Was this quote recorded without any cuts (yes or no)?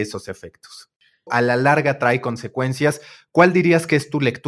no